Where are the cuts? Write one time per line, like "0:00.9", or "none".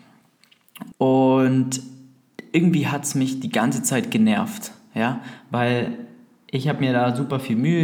0:00.9